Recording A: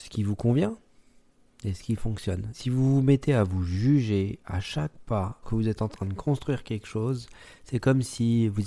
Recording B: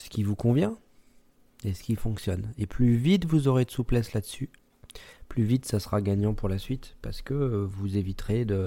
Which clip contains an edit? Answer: A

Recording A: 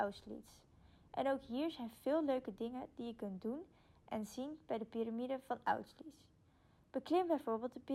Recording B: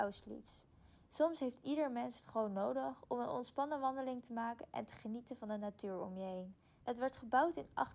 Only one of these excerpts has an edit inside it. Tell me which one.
B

